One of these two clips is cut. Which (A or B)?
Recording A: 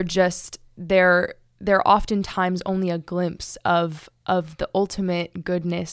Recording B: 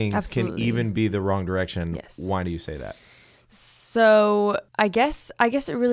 B